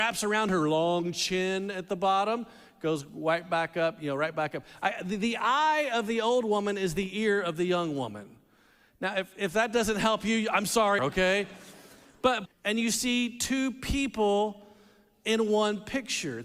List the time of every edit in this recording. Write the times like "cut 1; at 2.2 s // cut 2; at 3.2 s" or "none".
cut 1; at 11.0 s // cut 2; at 12.5 s